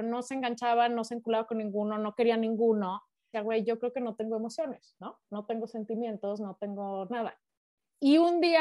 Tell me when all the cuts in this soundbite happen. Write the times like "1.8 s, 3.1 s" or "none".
3.3 s